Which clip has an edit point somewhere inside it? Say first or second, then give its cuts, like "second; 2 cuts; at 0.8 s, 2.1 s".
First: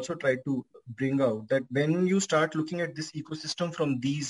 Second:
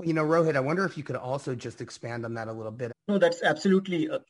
second; 1 cut; at 2.9 s